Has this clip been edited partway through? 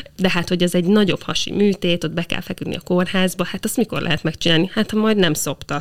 no; 0 cuts

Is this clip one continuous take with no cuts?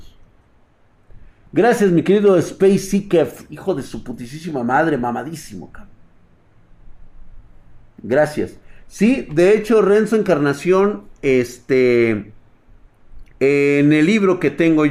no; 1 cut; at 13.3 s

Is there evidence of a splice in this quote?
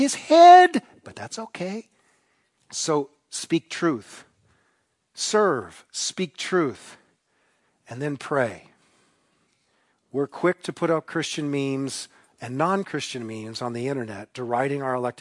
yes; 2 cuts; at 2.6 s, 9.9 s

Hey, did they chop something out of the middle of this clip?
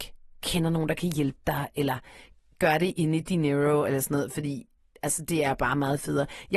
no; 0 cuts

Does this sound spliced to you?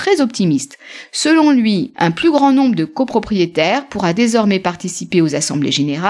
yes; 1 cut; at 1.9 s

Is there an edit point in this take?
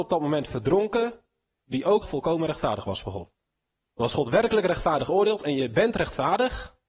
yes; 2 cuts; at 2.0 s, 3.9 s

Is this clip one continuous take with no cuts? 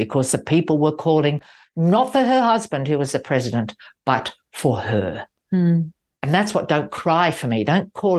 yes; 0 cuts

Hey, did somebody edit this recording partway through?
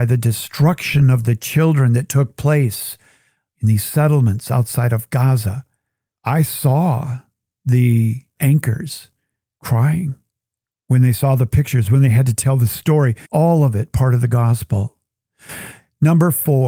yes; 2 cuts; at 6.2 s, 13.2 s

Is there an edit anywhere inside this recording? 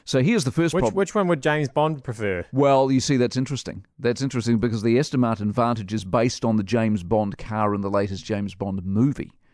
no; 0 cuts

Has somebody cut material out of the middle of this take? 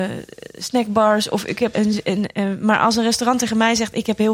yes; 1 cut; at 1.7 s

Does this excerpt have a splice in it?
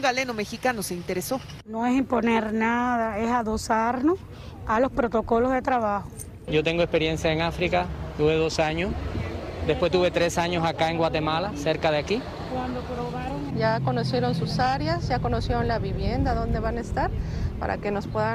yes; 1 cut; at 13.5 s

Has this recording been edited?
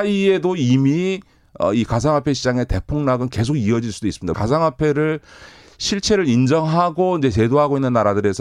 yes; 1 cut; at 4.3 s

